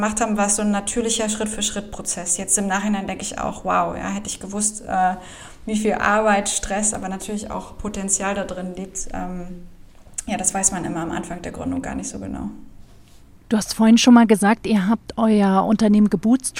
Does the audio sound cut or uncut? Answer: uncut